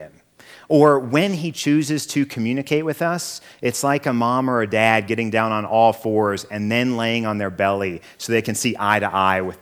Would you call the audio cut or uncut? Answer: uncut